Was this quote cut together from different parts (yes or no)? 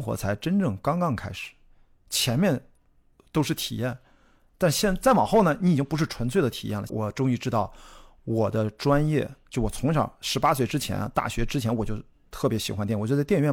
yes